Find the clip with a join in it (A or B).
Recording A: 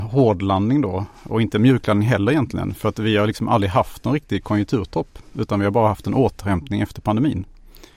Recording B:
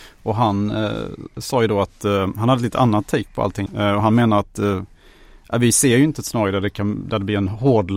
B